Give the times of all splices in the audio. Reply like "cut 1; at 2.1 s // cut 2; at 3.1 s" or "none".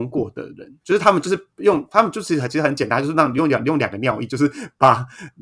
none